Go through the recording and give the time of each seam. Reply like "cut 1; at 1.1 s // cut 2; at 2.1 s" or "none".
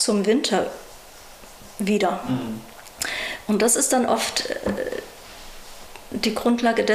none